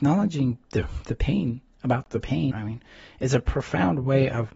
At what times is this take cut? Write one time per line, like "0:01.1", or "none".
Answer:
0:02.5